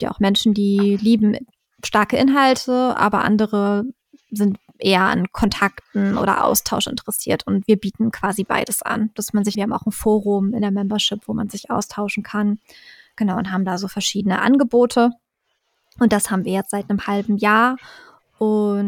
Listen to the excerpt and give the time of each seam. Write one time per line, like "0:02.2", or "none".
0:09.5